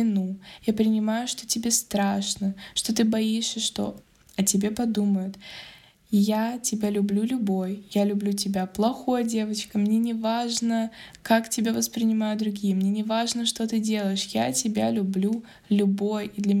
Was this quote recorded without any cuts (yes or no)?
yes